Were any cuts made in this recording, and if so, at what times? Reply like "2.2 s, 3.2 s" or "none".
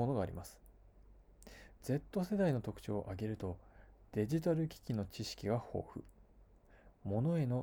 1.8 s